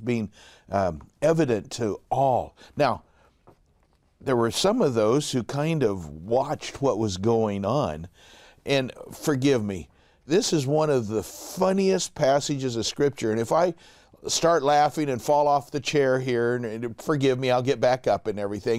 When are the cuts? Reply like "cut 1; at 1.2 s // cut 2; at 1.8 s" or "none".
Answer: cut 1; at 10.3 s